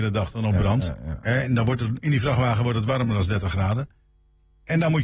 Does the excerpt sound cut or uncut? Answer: uncut